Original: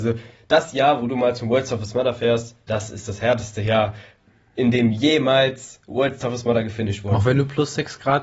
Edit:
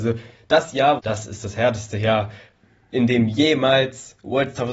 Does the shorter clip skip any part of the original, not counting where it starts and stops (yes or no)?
yes